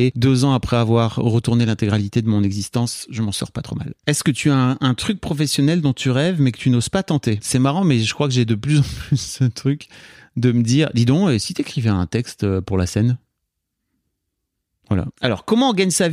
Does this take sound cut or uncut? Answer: uncut